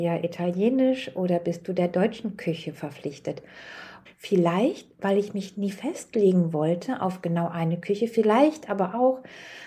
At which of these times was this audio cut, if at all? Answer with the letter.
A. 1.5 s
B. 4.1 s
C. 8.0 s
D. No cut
B